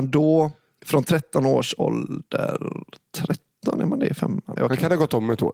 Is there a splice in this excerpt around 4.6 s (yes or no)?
yes